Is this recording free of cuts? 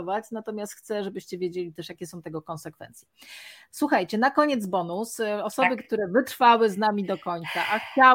yes; 0 cuts

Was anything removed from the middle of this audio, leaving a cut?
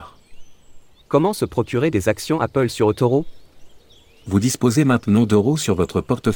yes; 1 cut; at 1.0 s

